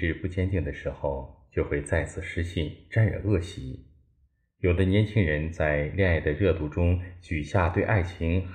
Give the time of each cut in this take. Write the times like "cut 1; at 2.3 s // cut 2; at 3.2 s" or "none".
none